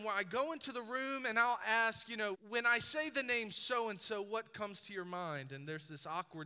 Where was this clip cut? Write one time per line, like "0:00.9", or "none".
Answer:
0:02.3